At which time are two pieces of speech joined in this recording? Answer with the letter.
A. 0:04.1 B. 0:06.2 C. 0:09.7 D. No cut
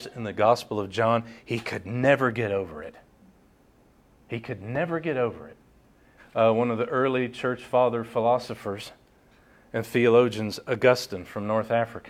B